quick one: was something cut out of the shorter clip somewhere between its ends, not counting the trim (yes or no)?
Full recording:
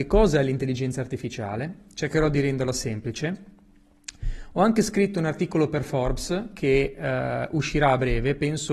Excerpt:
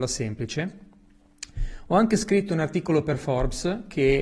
no